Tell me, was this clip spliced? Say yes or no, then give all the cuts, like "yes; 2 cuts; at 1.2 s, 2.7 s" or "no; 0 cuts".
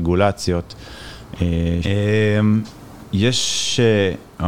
yes; 1 cut; at 1.8 s